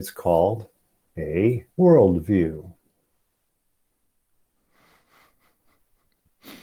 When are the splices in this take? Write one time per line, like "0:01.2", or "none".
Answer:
0:01.7